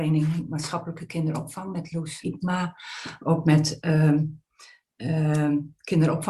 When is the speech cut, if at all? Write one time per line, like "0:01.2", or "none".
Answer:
0:02.2